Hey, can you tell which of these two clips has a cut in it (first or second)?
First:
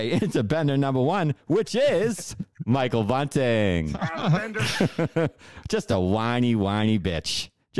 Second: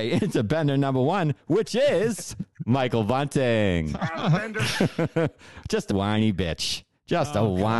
second